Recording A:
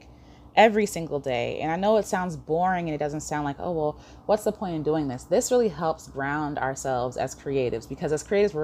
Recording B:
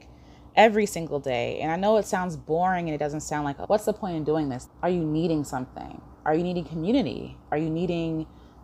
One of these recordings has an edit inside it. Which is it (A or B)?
B